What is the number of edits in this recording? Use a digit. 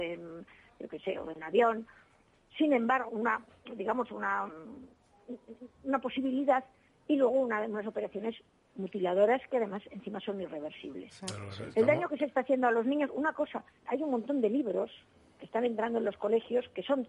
2